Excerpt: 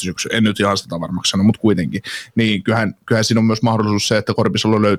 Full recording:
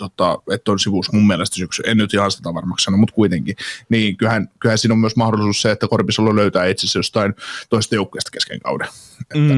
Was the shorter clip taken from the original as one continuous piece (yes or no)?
yes